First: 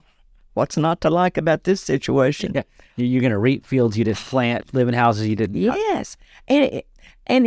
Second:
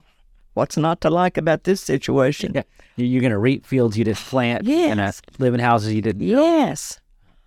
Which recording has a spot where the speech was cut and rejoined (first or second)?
first